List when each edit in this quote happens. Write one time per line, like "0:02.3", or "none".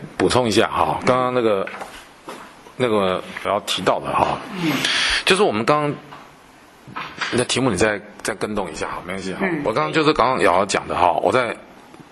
0:03.4